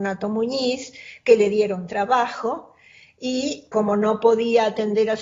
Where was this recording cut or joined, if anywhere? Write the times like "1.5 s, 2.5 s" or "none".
3.7 s